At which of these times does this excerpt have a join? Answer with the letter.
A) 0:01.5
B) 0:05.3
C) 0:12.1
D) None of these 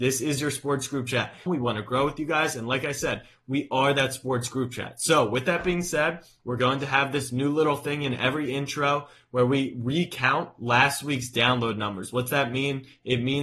A